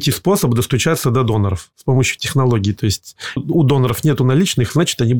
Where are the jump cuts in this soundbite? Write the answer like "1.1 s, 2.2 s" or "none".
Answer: 3.4 s